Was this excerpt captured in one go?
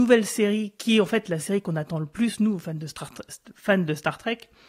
yes; 0 cuts

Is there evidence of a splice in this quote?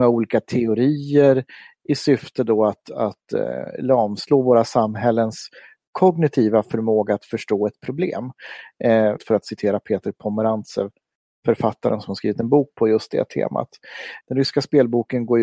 yes; 2 cuts; at 9.2 s, 14.2 s

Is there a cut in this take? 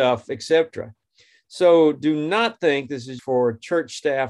yes; 1 cut; at 3.2 s

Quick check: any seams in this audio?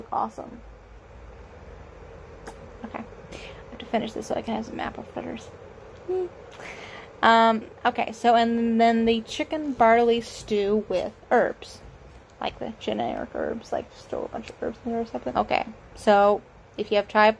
yes; 1 cut; at 15.3 s

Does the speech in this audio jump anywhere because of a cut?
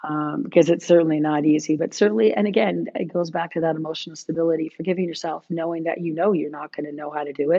no; 0 cuts

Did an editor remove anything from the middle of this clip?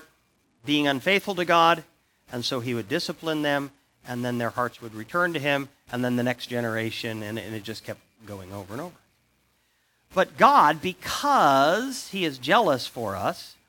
no; 0 cuts

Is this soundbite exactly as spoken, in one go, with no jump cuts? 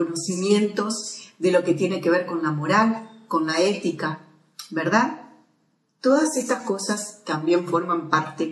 yes; 0 cuts

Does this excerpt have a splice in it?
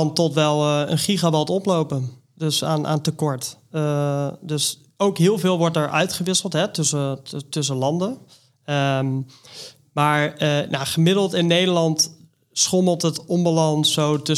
no; 0 cuts

